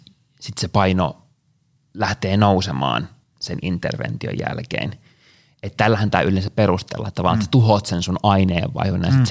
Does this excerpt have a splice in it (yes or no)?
no